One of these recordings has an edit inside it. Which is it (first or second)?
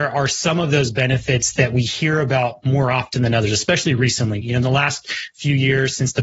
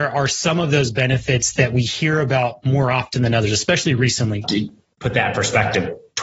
second